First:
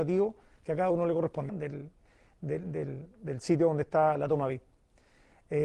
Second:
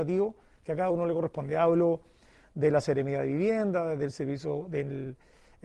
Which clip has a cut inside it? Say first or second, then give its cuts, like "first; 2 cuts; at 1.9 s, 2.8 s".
first; 1 cut; at 1.5 s